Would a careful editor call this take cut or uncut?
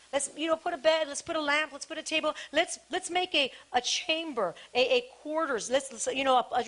uncut